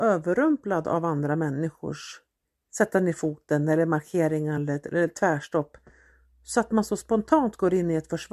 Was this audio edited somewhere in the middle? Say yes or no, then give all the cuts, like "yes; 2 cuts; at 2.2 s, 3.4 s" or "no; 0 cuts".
no; 0 cuts